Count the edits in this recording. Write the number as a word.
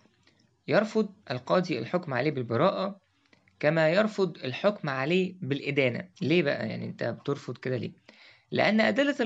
two